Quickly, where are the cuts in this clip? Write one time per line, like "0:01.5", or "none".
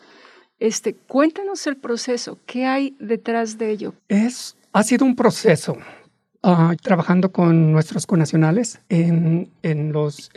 0:04.0
0:06.7
0:08.8